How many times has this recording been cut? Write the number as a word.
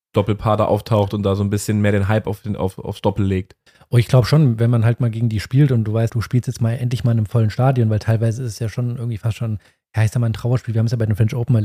one